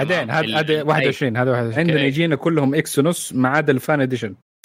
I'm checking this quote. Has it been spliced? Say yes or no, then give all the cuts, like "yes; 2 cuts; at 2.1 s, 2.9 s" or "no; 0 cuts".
yes; 1 cut; at 1.8 s